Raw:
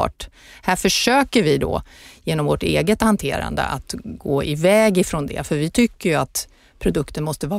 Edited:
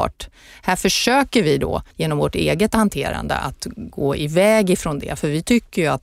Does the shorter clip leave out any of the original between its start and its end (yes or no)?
yes